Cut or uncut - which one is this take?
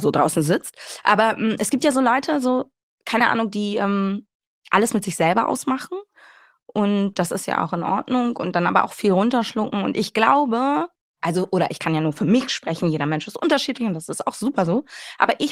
uncut